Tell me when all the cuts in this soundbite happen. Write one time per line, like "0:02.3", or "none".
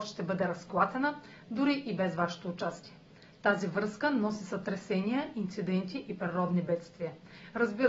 none